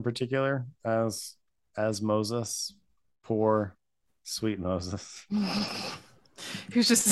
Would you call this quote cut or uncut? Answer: uncut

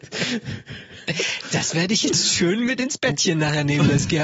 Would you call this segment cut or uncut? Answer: uncut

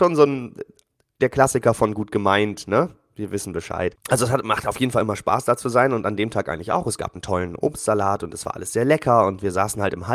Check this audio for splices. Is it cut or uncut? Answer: uncut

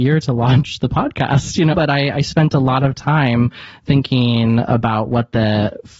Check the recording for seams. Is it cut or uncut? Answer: cut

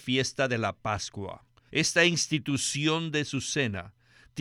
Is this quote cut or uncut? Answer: cut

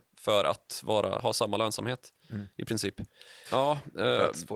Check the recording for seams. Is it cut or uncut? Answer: cut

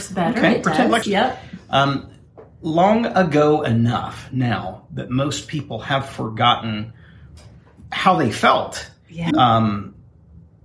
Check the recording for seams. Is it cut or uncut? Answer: cut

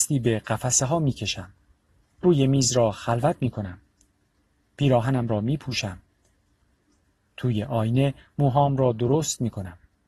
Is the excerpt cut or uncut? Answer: uncut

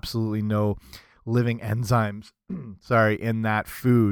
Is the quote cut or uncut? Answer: uncut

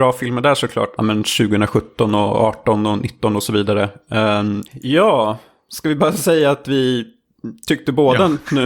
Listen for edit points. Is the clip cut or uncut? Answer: cut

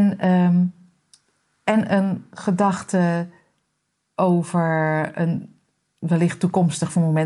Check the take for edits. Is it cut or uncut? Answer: uncut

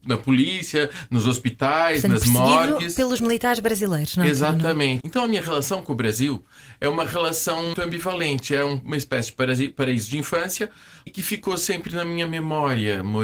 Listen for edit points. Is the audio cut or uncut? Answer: cut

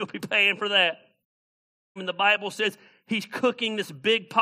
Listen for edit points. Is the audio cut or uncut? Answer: cut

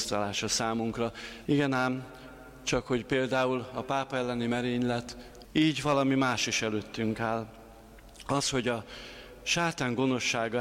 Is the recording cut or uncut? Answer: cut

